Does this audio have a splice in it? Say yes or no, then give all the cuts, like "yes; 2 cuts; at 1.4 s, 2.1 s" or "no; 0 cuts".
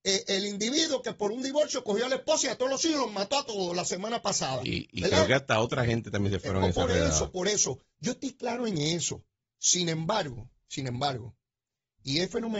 no; 0 cuts